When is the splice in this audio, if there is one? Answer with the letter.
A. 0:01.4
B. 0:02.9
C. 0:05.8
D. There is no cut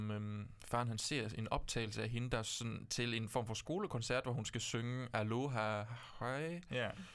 D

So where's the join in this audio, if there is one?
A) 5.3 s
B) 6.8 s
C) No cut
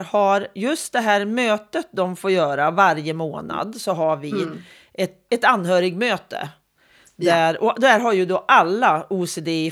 A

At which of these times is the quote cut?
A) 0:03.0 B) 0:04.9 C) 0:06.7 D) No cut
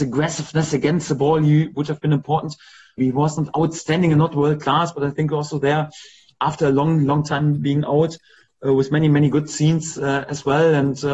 A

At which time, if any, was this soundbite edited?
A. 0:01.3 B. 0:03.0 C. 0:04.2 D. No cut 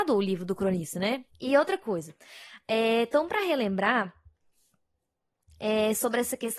A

